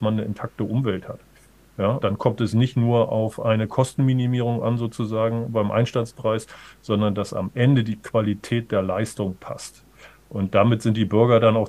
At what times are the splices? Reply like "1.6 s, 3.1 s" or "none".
2.0 s